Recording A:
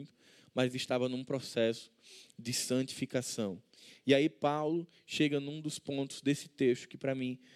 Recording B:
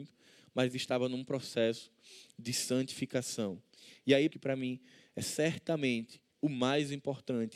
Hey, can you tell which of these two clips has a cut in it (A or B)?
B